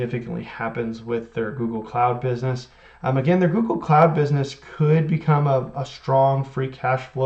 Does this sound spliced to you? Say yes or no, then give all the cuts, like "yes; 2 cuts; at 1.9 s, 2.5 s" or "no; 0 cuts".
no; 0 cuts